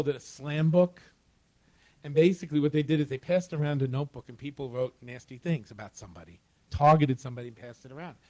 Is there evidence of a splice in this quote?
yes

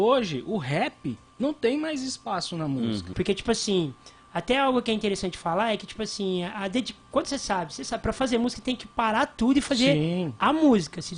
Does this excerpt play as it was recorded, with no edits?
no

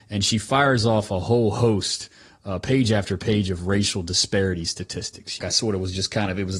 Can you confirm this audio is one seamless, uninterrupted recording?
no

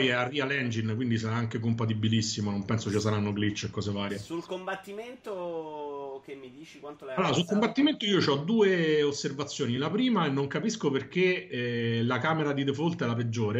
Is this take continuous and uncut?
yes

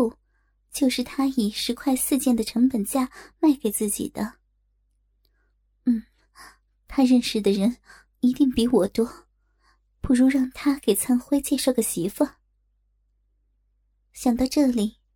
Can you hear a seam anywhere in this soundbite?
no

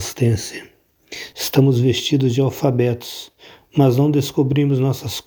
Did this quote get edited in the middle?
yes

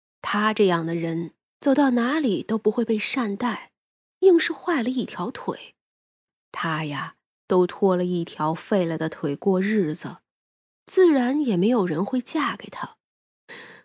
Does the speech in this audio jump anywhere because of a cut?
yes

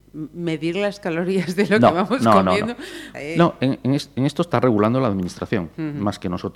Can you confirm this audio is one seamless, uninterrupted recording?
no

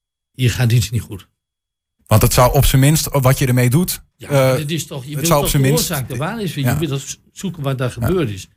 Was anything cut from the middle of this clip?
no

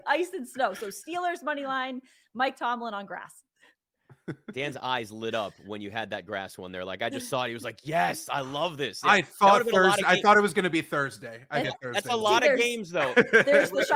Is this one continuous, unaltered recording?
no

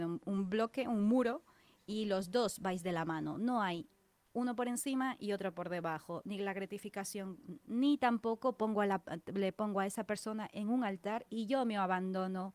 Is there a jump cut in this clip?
yes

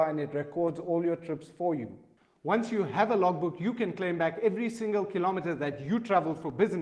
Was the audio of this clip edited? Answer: no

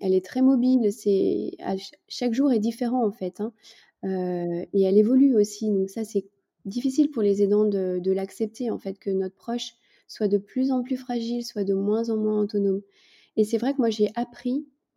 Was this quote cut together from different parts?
no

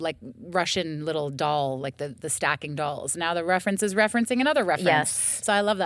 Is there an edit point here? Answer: yes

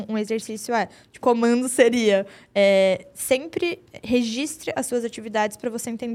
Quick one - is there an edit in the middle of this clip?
yes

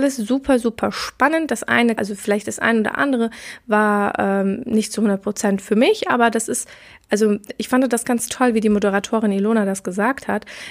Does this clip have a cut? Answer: yes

